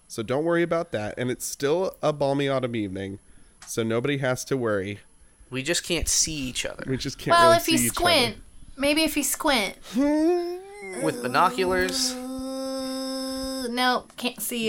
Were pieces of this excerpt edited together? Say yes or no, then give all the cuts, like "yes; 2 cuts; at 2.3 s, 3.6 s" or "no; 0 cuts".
no; 0 cuts